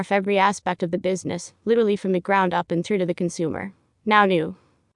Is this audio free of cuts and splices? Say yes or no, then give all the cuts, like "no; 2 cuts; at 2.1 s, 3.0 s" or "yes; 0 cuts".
no; 1 cut; at 3.9 s